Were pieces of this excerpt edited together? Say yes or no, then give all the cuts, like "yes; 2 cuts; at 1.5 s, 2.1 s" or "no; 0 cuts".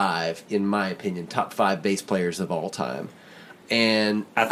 yes; 1 cut; at 3.6 s